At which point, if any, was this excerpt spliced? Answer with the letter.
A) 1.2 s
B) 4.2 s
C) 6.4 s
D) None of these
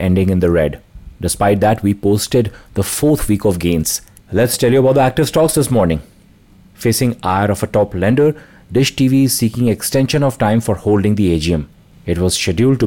B